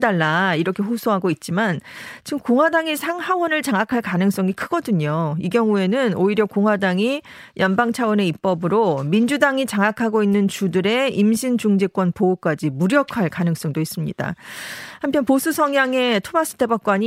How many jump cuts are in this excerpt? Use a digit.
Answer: 0